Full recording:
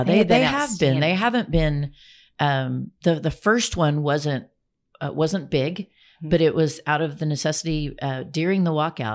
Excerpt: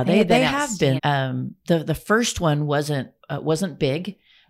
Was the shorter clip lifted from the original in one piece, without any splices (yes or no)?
no